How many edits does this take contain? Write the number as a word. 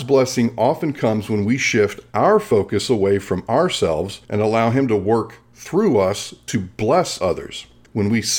one